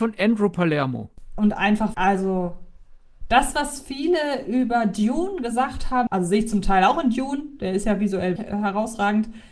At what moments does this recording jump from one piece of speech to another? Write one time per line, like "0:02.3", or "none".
0:01.9
0:06.1
0:08.4